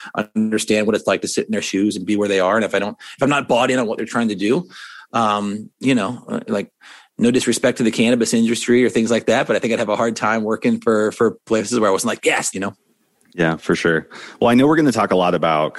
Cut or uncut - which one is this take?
cut